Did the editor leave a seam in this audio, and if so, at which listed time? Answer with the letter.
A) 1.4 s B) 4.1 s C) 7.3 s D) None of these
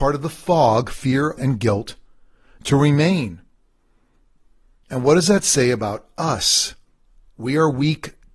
A